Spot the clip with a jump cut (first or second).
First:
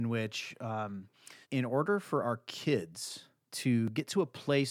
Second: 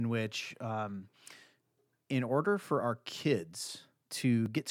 first